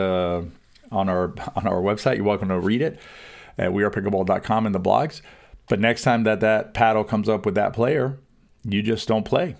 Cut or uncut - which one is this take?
uncut